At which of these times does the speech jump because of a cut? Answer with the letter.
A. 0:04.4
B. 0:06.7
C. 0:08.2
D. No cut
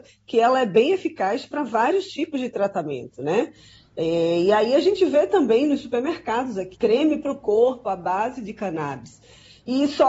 B